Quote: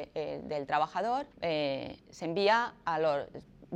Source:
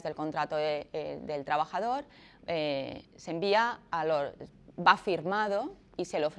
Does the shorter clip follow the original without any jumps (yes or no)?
no